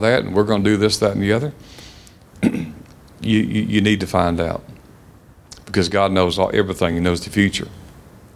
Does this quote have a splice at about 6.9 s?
no; 0 cuts

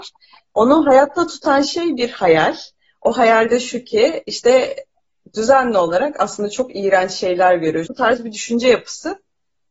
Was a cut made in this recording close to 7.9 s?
yes; 1 cut; at 7.9 s

